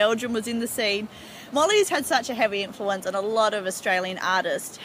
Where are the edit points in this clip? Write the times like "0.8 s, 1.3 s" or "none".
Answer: none